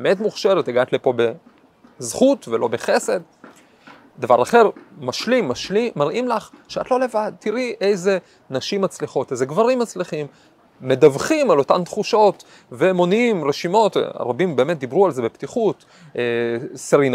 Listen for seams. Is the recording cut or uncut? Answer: uncut